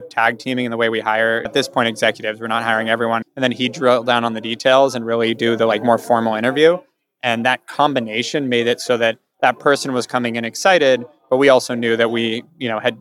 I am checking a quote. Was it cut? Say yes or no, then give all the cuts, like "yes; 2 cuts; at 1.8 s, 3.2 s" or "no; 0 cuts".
yes; 2 cuts; at 1.5 s, 3.2 s